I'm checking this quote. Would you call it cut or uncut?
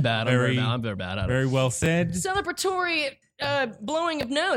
uncut